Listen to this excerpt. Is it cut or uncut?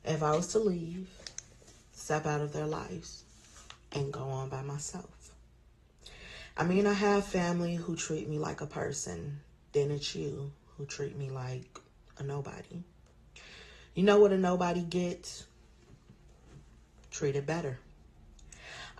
uncut